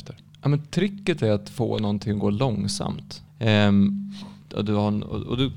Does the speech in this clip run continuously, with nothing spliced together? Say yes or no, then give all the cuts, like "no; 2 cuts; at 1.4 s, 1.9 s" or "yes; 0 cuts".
no; 2 cuts; at 3.3 s, 4.4 s